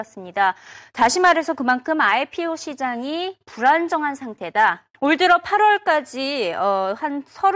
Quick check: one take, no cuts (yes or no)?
no